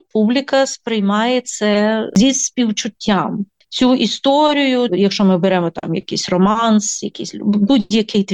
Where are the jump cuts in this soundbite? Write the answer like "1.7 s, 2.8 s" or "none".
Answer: 4.9 s